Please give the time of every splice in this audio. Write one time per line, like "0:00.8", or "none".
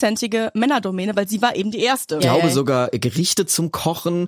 0:02.2